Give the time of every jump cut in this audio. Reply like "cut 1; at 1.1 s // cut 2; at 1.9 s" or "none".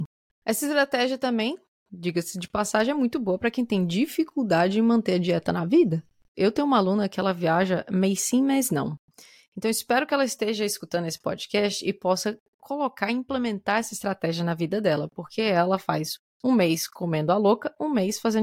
cut 1; at 6.3 s